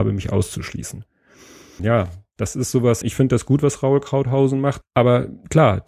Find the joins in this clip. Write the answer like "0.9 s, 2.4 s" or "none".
1.8 s, 3.0 s, 4.8 s